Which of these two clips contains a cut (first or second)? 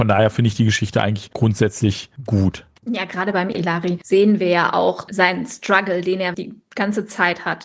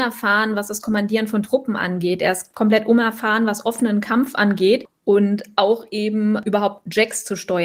first